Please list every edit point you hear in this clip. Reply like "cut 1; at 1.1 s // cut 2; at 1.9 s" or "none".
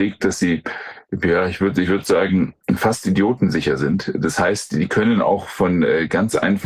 none